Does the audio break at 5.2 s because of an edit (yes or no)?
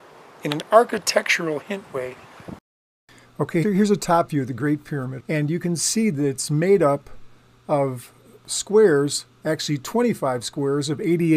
yes